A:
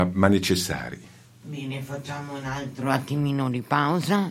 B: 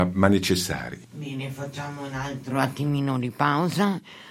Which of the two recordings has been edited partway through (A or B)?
B